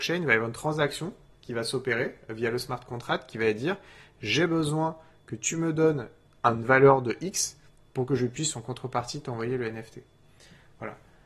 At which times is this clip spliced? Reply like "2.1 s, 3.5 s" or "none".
none

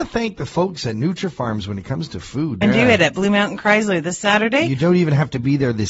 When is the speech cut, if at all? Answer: 2.6 s

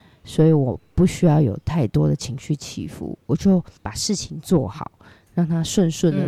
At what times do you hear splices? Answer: 3.8 s

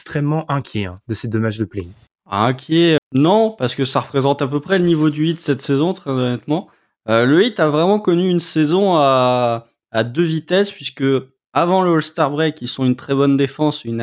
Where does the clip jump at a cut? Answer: 3.0 s

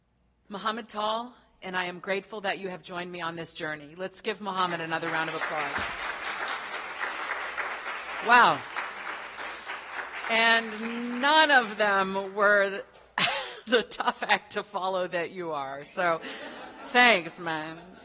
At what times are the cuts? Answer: 1.6 s

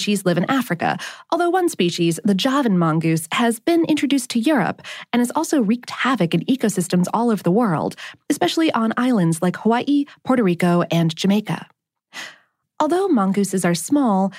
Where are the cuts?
none

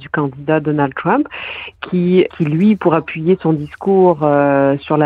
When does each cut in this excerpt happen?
2.3 s

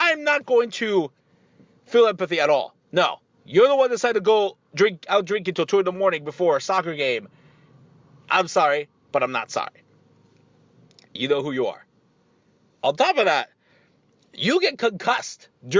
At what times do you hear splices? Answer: none

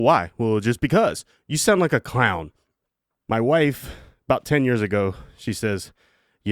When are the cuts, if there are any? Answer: 3.2 s

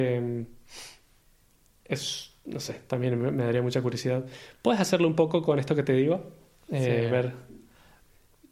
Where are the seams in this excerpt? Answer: none

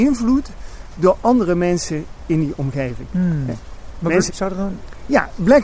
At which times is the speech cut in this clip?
4.3 s

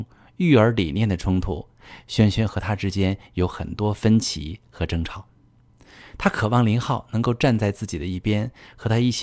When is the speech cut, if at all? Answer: none

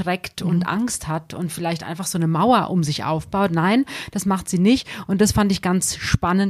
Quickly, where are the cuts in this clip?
none

